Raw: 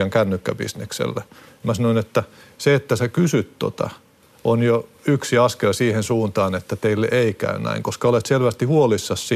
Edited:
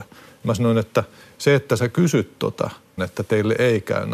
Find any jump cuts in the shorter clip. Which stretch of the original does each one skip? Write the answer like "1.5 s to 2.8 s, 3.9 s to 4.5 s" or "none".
4.2 s to 6.5 s